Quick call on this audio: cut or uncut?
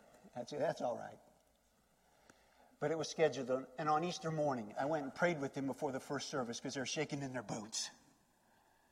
uncut